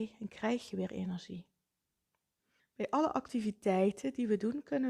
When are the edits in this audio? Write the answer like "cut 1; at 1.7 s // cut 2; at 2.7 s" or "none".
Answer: cut 1; at 2.6 s